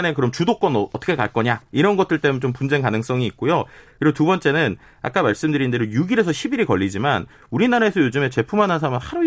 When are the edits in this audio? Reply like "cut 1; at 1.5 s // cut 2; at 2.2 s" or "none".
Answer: cut 1; at 3.9 s